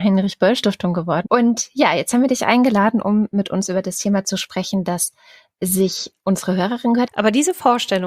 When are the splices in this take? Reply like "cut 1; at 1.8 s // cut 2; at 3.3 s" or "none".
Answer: cut 1; at 1.2 s // cut 2; at 7.1 s